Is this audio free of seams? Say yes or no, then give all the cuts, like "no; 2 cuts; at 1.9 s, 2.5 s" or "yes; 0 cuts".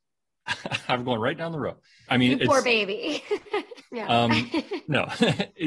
no; 2 cuts; at 2.1 s, 3.8 s